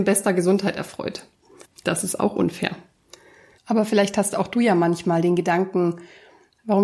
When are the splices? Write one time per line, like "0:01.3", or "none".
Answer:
0:01.6
0:03.6